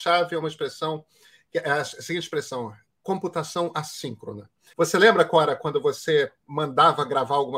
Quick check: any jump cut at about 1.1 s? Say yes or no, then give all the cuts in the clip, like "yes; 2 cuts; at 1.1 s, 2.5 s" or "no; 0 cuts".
no; 1 cut; at 4.7 s